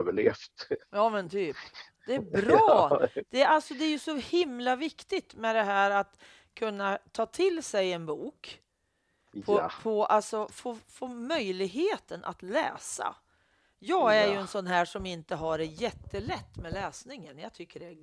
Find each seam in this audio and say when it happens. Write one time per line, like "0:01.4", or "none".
none